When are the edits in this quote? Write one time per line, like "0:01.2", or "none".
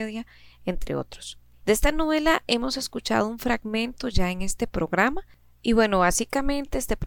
0:01.6